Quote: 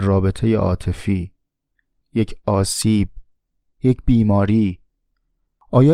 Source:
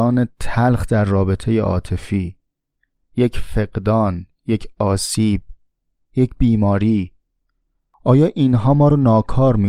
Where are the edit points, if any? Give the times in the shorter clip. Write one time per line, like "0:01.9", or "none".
0:02.0